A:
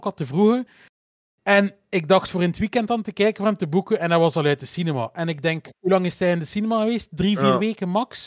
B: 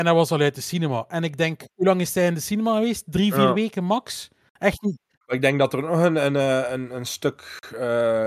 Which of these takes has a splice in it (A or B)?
B